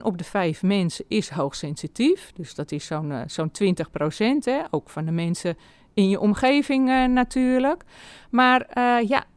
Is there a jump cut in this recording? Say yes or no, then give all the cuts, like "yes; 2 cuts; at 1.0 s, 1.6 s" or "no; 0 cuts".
no; 0 cuts